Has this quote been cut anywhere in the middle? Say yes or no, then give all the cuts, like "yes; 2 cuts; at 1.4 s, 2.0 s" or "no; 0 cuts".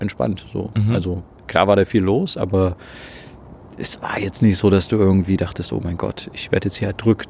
no; 0 cuts